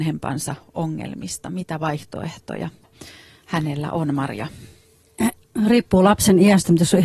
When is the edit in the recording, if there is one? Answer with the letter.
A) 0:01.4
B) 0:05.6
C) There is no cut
C